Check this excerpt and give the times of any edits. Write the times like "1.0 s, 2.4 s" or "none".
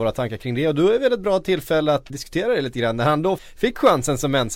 2.1 s, 3.4 s